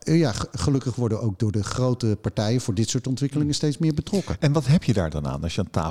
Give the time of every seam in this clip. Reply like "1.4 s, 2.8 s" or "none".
none